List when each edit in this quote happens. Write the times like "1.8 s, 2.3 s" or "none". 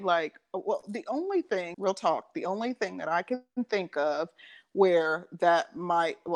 1.7 s